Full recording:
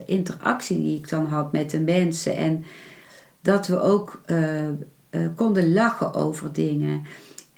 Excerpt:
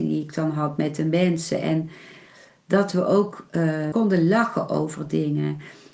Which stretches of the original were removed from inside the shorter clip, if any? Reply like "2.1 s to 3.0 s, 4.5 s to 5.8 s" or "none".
4.7 s to 5.4 s